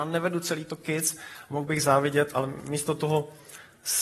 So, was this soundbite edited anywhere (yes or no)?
no